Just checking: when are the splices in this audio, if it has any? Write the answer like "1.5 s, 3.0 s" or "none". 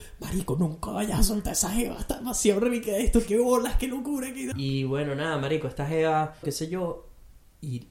4.5 s, 6.4 s